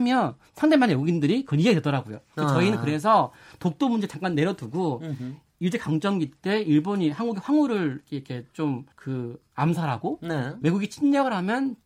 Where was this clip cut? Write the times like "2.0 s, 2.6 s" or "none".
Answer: 8.9 s, 10.6 s